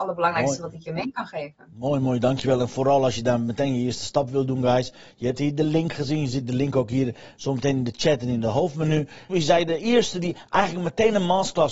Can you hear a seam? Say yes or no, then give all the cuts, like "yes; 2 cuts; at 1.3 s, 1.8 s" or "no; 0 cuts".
yes; 1 cut; at 9.3 s